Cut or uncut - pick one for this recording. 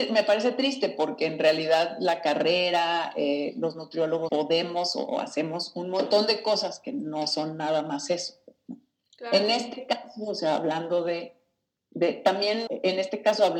cut